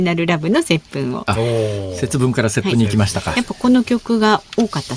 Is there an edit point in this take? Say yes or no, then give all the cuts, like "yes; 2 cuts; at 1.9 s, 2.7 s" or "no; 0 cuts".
no; 0 cuts